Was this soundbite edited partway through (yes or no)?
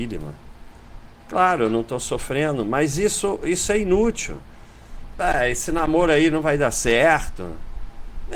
yes